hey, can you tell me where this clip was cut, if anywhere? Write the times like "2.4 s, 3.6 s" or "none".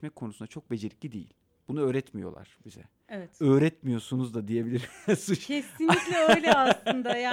none